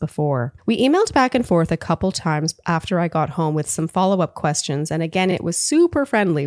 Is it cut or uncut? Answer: uncut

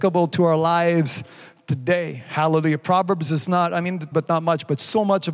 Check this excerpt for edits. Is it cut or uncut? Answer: cut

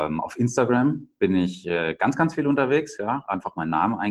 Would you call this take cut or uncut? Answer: uncut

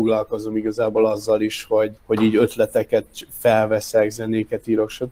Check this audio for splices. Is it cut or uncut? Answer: cut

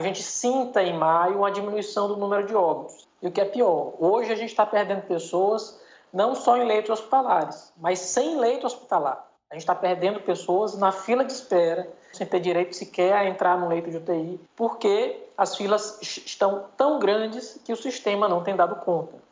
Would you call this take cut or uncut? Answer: cut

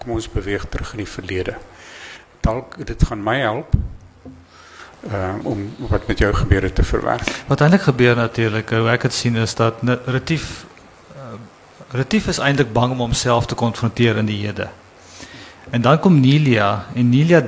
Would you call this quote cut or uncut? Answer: cut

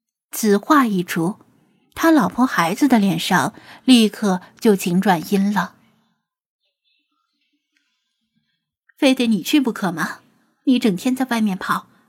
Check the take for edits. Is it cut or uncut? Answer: uncut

